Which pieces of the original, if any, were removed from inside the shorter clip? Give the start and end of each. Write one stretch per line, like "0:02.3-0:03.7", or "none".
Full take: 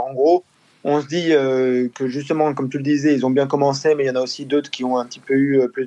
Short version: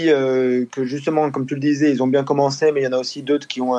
none